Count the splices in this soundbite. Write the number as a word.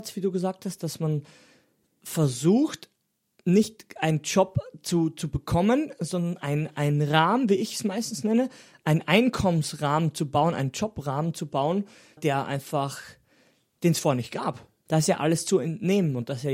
two